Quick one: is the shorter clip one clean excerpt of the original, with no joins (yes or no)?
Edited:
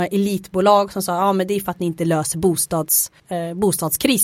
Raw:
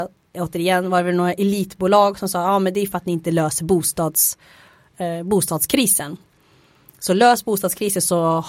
no